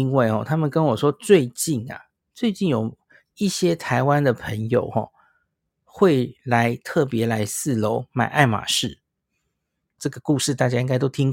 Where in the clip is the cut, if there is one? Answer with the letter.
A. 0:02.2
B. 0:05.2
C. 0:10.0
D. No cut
C